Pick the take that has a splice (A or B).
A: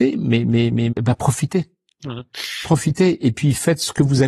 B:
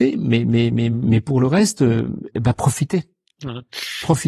A